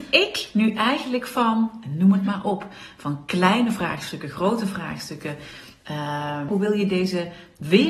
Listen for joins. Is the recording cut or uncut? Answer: cut